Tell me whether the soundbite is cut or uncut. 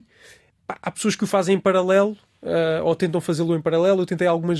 uncut